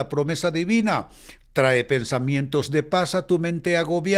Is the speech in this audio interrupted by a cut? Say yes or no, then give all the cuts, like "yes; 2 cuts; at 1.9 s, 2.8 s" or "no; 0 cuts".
no; 0 cuts